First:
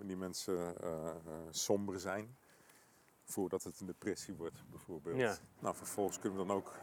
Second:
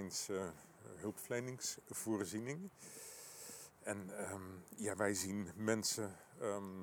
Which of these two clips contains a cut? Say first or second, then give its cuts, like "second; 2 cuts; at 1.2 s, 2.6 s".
first; 1 cut; at 5.6 s